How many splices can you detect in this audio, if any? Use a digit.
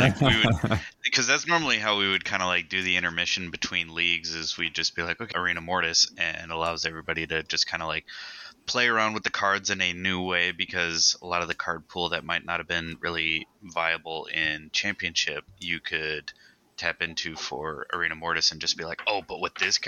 1